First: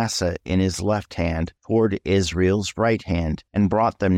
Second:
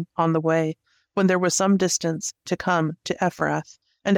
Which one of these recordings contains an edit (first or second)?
second